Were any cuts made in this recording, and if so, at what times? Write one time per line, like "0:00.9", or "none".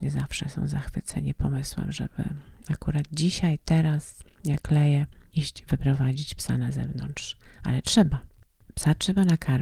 none